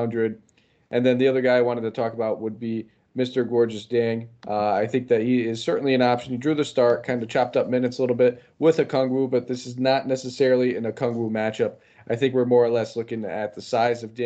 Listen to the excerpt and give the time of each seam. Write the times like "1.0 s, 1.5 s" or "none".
none